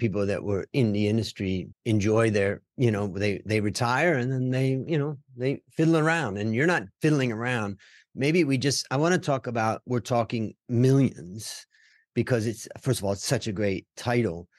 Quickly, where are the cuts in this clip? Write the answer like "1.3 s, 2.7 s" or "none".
1.7 s